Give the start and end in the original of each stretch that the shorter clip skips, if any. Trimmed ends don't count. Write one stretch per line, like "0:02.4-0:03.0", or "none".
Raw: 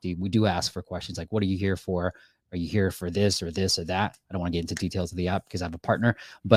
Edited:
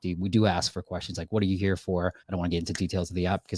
0:02.2-0:04.2